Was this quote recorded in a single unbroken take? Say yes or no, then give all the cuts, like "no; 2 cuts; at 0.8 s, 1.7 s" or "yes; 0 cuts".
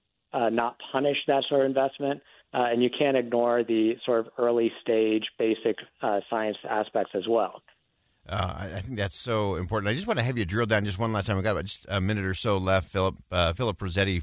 yes; 0 cuts